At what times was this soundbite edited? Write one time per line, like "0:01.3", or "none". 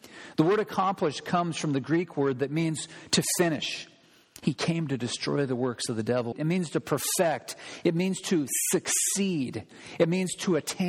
0:04.4
0:06.3